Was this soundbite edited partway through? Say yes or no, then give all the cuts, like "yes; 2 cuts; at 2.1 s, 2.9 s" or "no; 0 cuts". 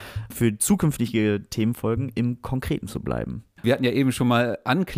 yes; 1 cut; at 3.6 s